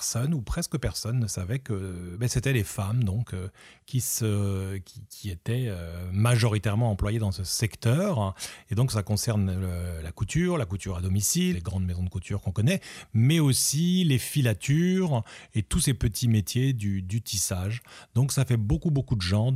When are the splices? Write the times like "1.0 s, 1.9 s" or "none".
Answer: 11.5 s